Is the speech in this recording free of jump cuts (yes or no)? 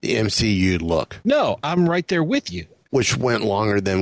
no